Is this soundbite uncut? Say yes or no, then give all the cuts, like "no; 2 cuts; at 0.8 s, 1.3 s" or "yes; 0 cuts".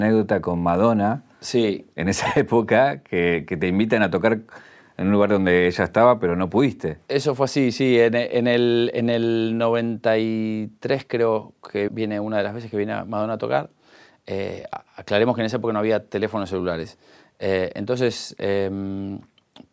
no; 1 cut; at 11.9 s